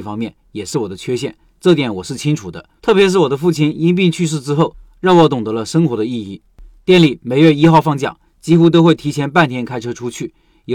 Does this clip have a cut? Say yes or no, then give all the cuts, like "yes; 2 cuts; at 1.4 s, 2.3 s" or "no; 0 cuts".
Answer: yes; 1 cut; at 2.8 s